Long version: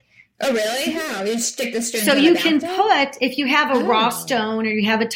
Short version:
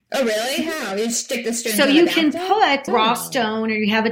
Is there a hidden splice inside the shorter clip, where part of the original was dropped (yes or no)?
yes